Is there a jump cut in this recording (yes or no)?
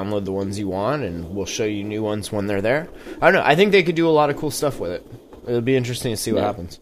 no